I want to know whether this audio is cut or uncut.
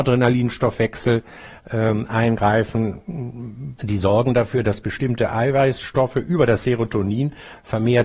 cut